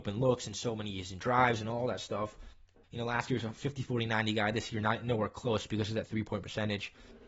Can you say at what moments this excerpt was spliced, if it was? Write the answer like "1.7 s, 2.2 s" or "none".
2.8 s

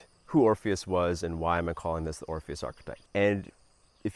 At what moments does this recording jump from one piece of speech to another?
3.0 s

